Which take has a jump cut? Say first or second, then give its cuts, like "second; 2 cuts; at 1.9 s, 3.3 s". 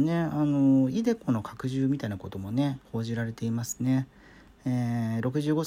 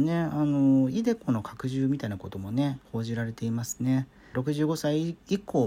second; 1 cut; at 4.3 s